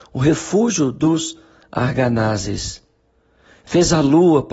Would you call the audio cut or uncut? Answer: uncut